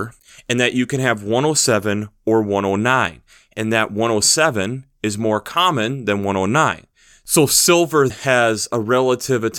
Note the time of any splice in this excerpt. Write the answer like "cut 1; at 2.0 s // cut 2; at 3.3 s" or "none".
cut 1; at 8.1 s